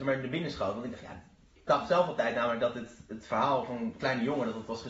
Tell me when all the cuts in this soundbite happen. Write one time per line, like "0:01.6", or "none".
none